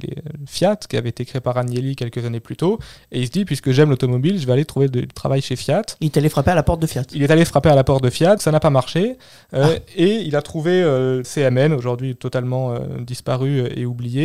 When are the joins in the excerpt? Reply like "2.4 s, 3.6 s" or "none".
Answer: 8.4 s, 11.2 s